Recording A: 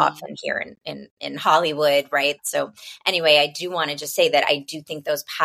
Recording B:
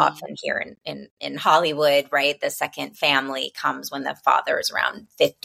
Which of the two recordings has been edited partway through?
A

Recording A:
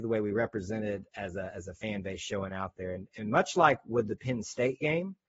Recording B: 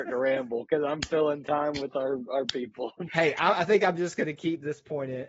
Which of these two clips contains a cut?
B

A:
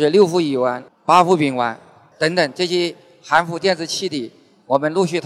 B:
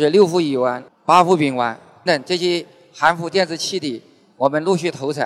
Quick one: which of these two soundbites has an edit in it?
B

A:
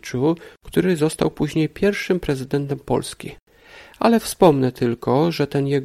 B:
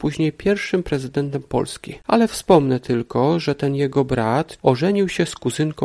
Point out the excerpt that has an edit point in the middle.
B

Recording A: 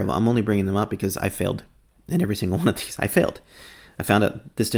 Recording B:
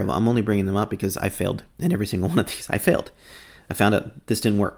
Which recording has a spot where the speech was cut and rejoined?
B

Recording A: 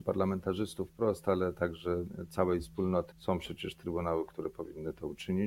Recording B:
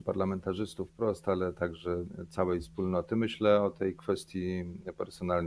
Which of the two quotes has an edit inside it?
A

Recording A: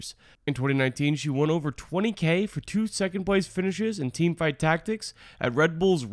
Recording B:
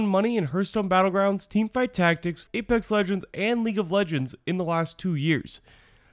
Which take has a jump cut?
B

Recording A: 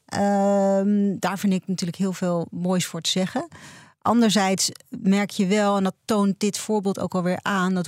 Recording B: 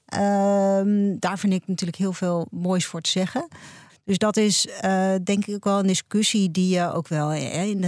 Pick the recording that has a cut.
B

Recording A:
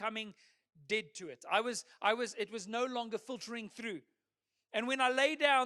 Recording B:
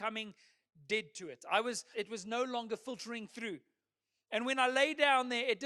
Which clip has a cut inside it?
B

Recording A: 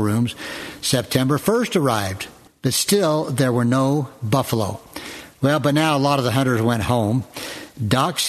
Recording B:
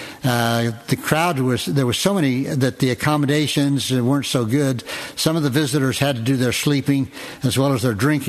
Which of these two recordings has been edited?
A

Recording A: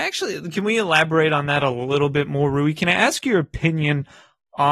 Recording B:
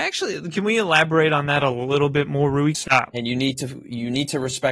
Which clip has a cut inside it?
B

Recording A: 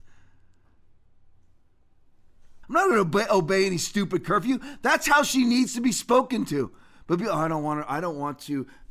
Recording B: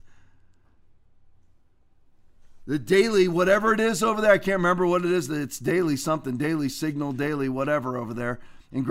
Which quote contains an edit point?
A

